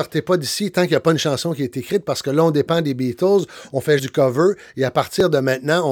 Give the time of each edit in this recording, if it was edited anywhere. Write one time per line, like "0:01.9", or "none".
0:04.0